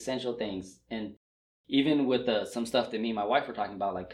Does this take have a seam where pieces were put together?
no; 0 cuts

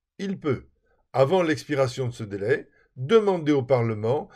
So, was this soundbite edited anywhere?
no; 0 cuts

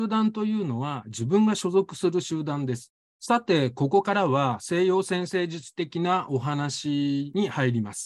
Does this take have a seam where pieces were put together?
yes; 1 cut; at 3.0 s

